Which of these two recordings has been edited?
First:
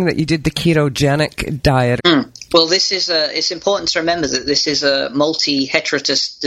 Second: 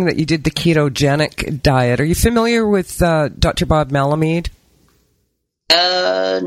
first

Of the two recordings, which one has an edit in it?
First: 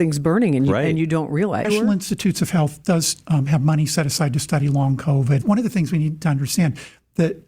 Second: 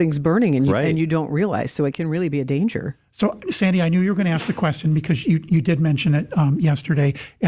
first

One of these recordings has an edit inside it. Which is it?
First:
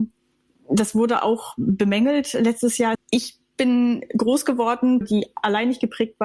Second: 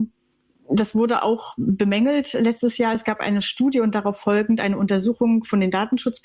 first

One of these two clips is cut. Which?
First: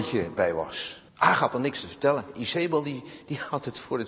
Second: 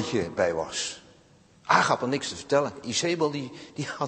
first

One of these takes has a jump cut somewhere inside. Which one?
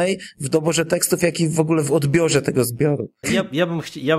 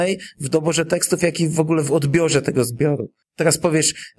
first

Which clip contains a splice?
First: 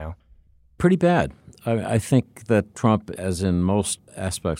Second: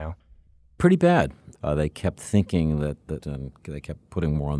second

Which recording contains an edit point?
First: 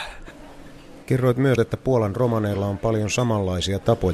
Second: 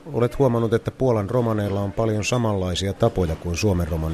first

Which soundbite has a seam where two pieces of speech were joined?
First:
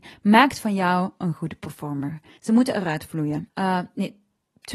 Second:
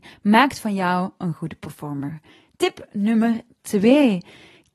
first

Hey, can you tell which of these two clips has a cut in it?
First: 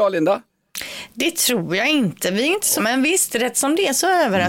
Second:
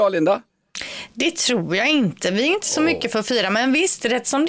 first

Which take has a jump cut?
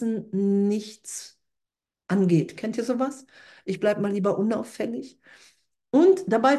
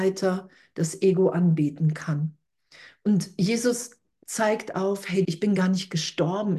second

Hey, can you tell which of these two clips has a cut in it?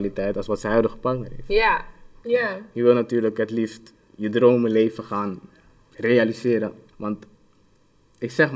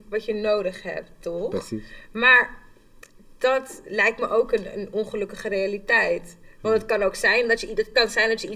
first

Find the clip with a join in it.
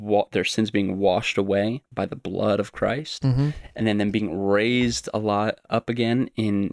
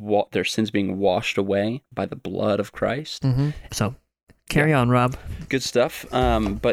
second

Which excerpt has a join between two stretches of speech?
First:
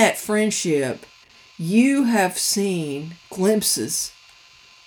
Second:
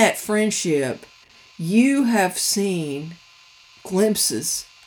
first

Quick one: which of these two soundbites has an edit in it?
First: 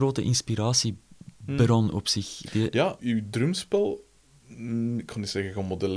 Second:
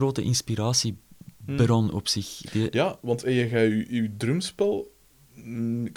first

